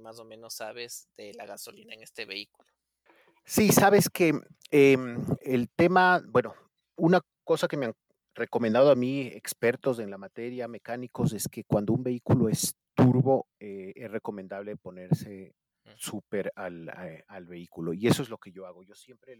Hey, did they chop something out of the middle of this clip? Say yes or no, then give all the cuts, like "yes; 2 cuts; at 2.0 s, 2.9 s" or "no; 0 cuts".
no; 0 cuts